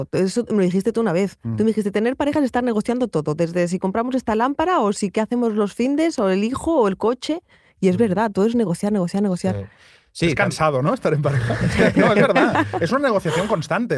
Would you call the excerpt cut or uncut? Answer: uncut